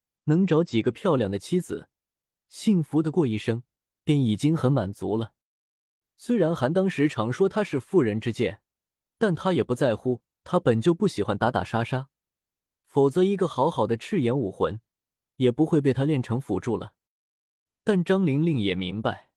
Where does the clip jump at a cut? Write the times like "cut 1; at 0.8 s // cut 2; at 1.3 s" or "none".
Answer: none